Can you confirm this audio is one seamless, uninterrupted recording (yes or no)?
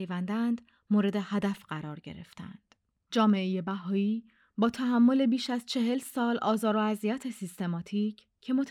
no